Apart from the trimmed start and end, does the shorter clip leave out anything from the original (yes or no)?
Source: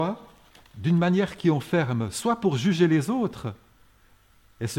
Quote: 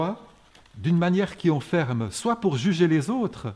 no